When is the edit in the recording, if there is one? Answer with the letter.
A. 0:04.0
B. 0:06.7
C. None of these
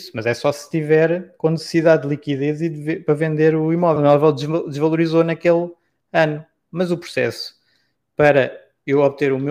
A